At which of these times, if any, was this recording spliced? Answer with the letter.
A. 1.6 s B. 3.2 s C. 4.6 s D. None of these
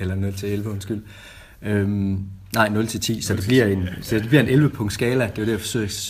D